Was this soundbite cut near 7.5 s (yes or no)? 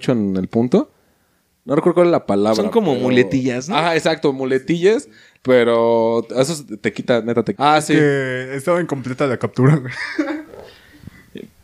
yes